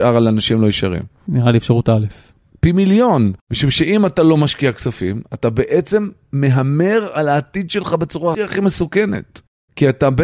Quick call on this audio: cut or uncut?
cut